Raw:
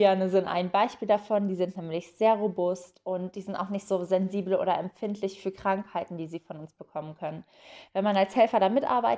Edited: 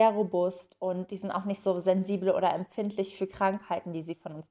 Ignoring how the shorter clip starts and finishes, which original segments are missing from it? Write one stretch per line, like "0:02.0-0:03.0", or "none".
none